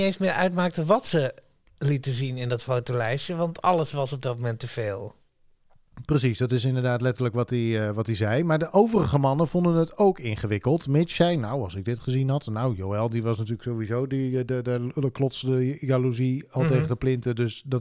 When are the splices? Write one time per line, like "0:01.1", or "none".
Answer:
none